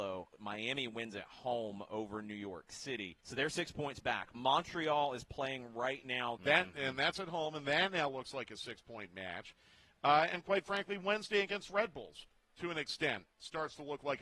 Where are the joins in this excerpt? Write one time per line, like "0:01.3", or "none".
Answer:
0:03.2
0:06.4